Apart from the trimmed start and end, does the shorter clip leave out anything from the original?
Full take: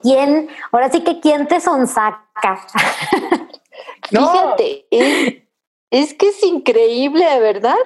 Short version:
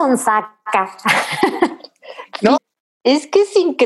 yes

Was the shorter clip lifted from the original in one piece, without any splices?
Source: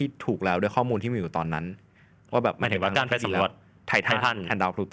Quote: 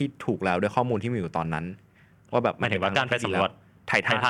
yes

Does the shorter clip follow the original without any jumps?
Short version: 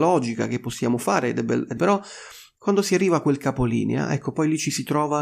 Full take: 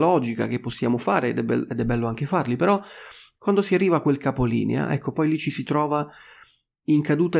no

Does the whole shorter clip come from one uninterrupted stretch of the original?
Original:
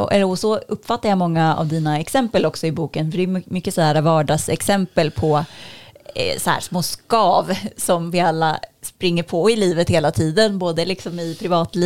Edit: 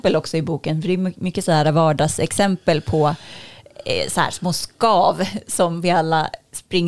yes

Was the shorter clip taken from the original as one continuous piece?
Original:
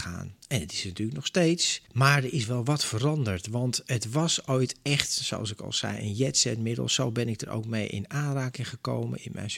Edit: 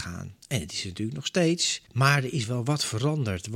yes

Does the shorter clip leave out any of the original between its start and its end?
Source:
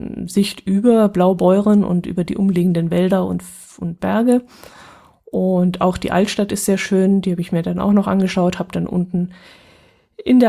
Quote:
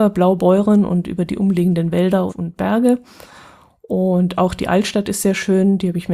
yes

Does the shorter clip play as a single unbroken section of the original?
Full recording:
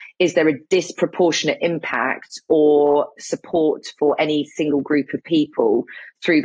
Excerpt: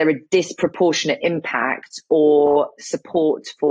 yes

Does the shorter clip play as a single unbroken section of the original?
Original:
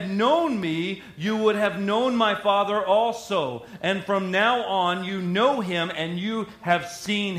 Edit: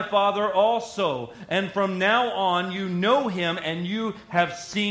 yes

